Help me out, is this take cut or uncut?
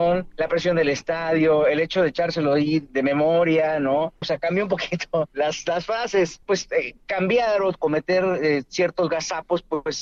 cut